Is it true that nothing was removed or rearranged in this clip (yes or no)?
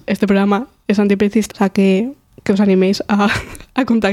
no